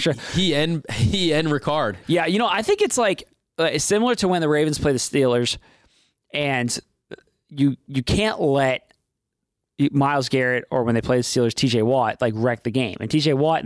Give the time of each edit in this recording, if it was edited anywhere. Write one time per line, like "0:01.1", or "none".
none